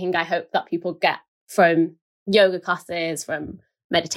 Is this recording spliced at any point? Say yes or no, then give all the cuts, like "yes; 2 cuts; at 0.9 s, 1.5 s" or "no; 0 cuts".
no; 0 cuts